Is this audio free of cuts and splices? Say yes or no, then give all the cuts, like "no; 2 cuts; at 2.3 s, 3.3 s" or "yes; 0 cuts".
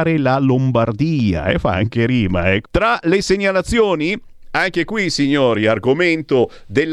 no; 1 cut; at 2.6 s